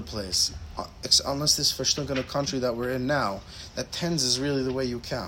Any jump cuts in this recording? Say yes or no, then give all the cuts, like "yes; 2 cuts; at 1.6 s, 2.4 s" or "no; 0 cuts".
no; 0 cuts